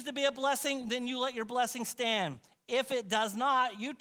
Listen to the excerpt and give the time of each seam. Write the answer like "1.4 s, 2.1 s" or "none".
none

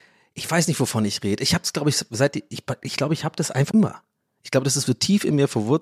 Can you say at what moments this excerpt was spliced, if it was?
3.7 s, 4.9 s

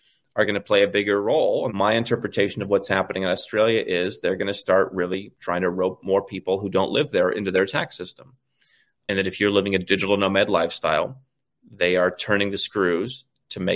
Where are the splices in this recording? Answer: 1.7 s

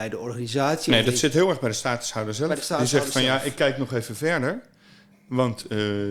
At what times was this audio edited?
none

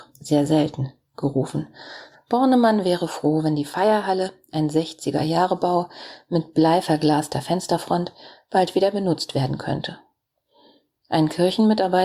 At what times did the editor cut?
2.1 s

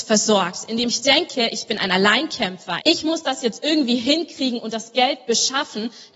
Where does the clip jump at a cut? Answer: 2.8 s

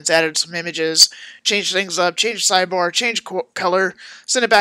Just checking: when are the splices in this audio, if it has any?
none

